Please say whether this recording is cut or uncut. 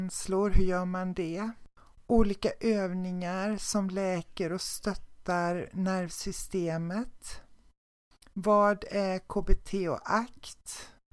uncut